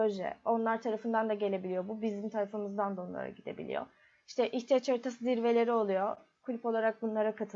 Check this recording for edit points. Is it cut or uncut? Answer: uncut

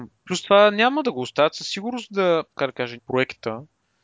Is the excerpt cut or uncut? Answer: cut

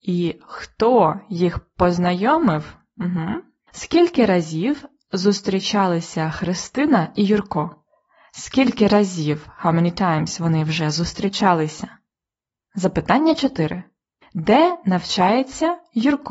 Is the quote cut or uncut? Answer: cut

